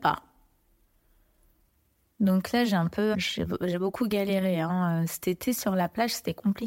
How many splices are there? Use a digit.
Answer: 1